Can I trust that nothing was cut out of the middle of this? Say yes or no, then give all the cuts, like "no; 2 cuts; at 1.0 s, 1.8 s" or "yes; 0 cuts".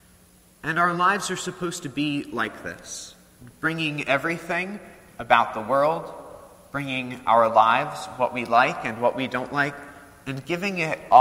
yes; 0 cuts